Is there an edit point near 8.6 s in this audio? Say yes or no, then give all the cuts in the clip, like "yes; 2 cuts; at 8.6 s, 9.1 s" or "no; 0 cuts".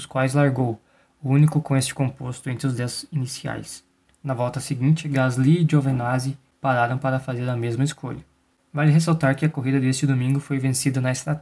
no; 1 cut; at 4.0 s